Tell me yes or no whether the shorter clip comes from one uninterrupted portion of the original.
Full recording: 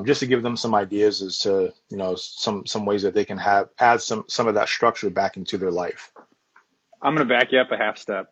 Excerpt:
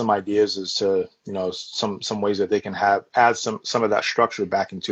yes